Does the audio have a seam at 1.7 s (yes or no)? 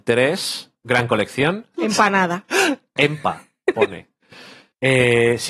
yes